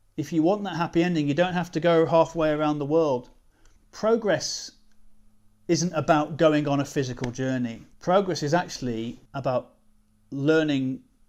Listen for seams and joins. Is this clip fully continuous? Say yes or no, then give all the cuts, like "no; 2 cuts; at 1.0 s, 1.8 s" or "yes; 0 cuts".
no; 3 cuts; at 3.8 s, 7.9 s, 9.3 s